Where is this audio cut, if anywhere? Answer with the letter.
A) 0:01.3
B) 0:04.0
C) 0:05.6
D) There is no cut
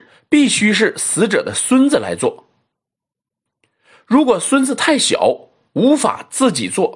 D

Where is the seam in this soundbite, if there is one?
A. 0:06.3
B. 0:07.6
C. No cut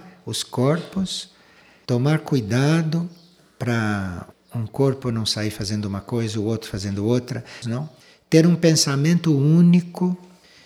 B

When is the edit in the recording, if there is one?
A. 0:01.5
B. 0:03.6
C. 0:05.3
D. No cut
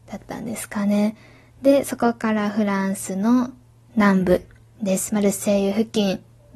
D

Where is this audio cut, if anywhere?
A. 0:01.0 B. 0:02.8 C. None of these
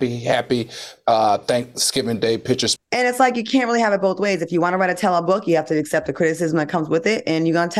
B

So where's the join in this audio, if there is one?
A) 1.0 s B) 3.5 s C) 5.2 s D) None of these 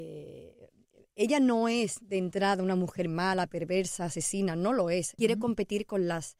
C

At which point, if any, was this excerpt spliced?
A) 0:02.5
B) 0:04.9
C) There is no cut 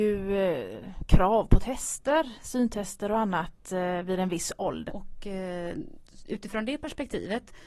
B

